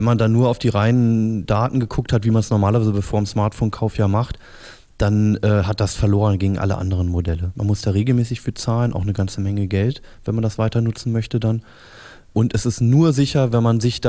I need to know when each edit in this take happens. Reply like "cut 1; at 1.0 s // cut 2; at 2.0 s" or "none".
cut 1; at 7.5 s

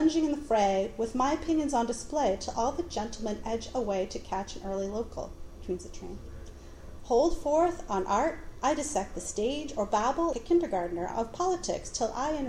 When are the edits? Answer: cut 1; at 7.0 s // cut 2; at 10.3 s

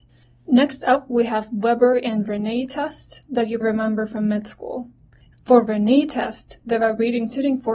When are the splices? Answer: cut 1; at 3.6 s // cut 2; at 5.3 s

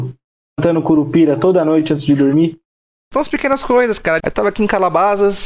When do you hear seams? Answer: cut 1; at 4.2 s

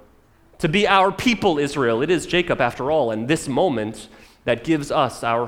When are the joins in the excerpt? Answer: none

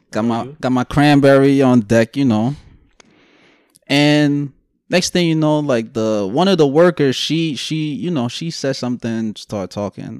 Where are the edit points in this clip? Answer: none

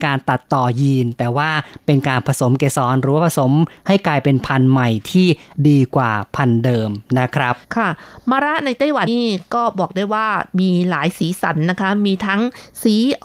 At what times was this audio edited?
cut 1; at 7.6 s // cut 2; at 9.1 s

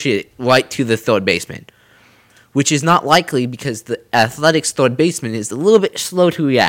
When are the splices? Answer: none

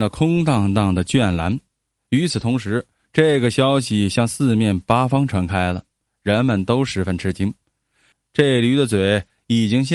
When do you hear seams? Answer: cut 1; at 8.1 s

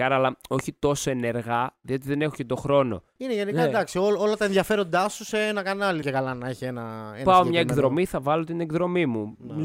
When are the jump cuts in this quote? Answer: cut 1; at 3.2 s // cut 2; at 6.0 s

